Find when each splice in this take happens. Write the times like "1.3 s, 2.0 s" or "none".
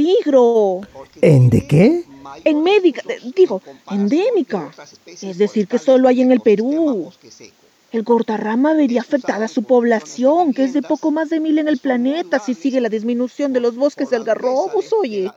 none